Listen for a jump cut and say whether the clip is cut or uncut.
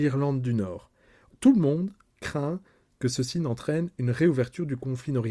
cut